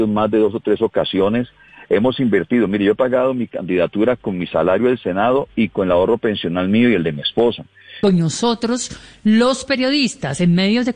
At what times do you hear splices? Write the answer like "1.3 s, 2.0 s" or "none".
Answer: 8.0 s